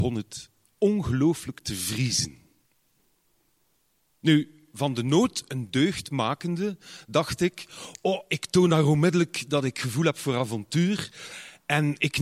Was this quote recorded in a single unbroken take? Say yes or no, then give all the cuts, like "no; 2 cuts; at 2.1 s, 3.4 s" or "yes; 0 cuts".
yes; 0 cuts